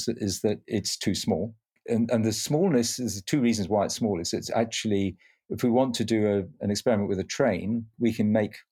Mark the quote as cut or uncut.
uncut